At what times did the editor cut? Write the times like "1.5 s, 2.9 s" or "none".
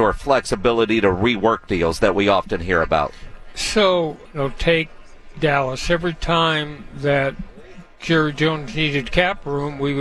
4.3 s

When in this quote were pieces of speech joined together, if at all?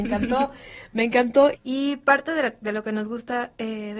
1.5 s

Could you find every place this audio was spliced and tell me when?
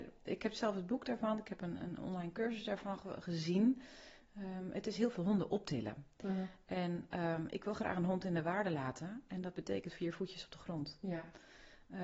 none

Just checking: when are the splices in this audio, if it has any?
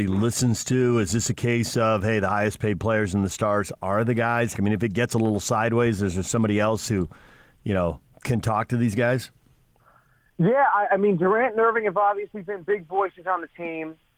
4.5 s

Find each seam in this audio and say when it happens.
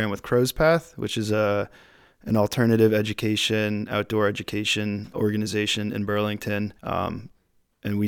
5.1 s, 6.8 s

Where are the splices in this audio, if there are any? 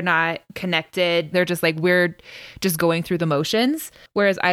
1.3 s

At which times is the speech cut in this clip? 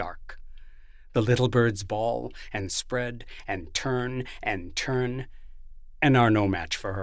none

